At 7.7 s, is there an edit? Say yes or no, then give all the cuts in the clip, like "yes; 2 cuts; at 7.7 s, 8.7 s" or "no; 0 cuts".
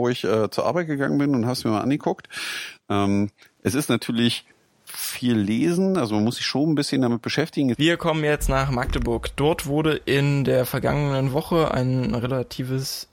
yes; 1 cut; at 7.7 s